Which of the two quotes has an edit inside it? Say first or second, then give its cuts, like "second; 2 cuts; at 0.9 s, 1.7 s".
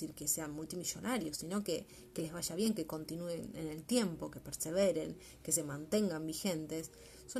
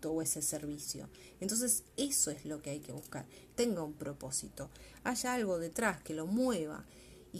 second; 1 cut; at 3.5 s